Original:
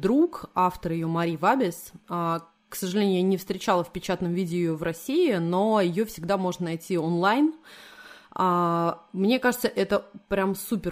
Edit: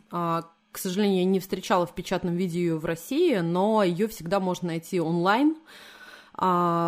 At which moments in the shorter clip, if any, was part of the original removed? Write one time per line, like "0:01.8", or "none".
none